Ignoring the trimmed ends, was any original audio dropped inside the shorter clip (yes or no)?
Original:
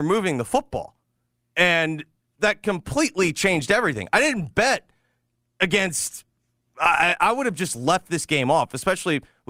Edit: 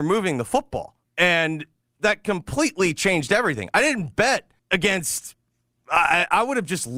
yes